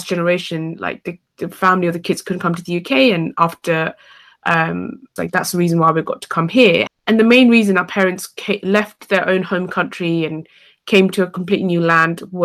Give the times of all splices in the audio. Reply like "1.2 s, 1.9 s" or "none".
5.2 s, 6.9 s

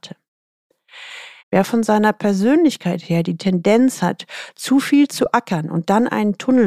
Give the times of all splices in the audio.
1.4 s

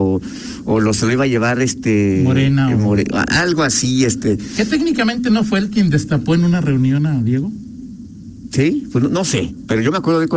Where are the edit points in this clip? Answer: none

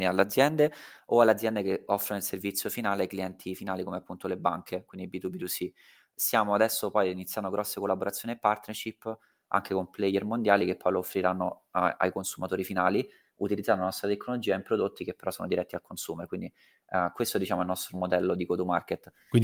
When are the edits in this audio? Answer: 12.0 s

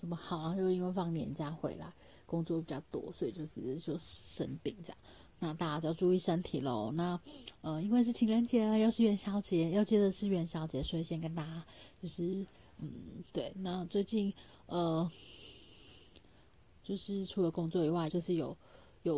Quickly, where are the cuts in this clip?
13.3 s, 18.1 s

